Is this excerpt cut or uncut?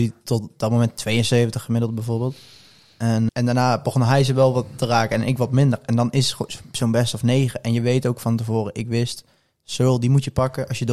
cut